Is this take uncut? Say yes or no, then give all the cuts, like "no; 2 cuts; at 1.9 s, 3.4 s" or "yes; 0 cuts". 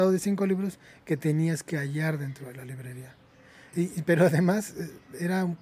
no; 1 cut; at 3.7 s